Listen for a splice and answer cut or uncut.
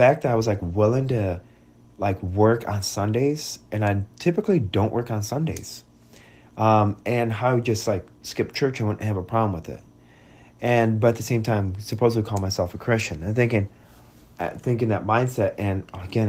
uncut